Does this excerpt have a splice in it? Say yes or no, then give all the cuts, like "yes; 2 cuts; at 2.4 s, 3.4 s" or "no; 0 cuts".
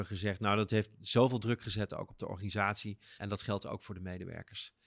yes; 1 cut; at 3.2 s